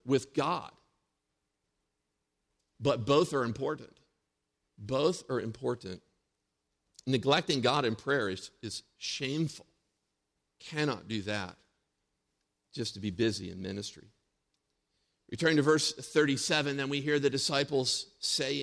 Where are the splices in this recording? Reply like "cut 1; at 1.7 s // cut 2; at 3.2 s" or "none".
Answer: none